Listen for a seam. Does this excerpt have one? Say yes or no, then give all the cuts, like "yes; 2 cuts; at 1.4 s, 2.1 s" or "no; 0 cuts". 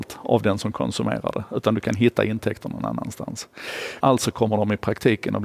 yes; 1 cut; at 4.0 s